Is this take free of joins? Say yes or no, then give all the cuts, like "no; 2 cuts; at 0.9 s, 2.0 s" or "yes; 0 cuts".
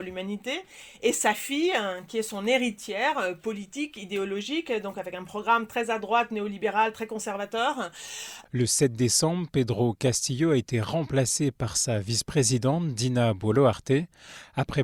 no; 1 cut; at 8.5 s